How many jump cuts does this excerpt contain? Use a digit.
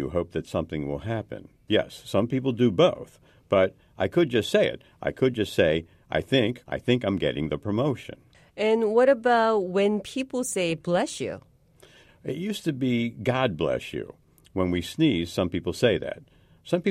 2